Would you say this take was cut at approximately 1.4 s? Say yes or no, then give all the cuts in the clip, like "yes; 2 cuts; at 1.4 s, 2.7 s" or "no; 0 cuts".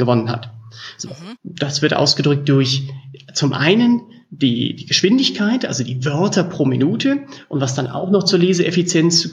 yes; 1 cut; at 1.4 s